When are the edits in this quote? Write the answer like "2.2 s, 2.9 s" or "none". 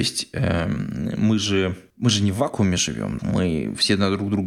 1.9 s, 3.2 s